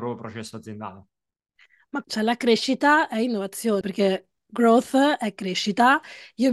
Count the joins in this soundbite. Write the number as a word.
two